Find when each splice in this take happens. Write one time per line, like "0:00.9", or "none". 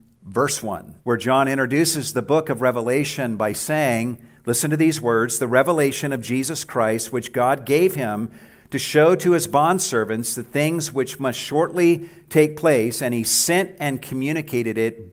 0:01.0